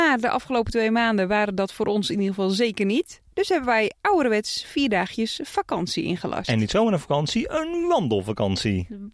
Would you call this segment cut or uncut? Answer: uncut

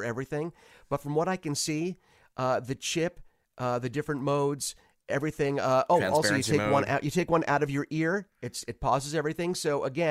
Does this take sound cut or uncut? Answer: uncut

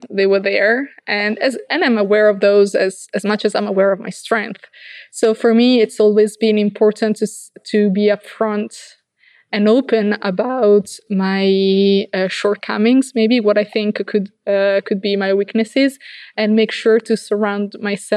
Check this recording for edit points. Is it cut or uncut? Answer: uncut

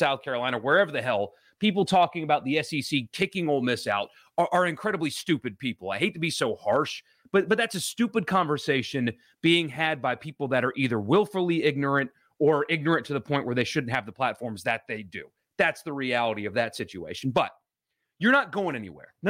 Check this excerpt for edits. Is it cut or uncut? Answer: uncut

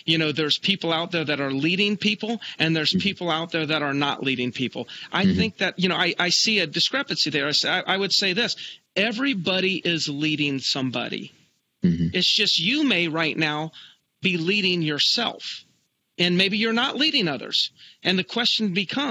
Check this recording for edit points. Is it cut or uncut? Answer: uncut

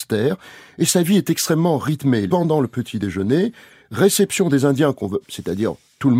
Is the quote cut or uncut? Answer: cut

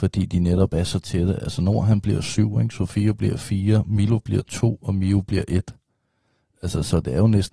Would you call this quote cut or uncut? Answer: uncut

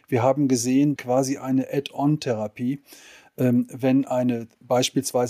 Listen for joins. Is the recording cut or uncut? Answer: cut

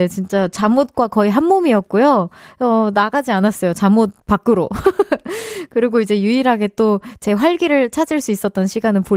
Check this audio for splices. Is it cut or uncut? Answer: cut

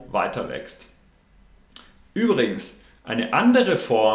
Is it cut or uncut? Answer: uncut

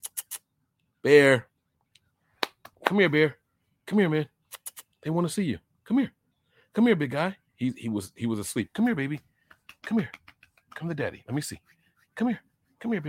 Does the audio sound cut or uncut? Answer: uncut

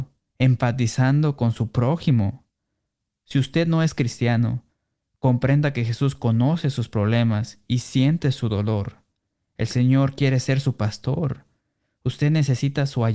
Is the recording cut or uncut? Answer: uncut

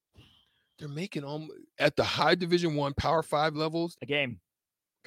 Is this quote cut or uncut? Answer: cut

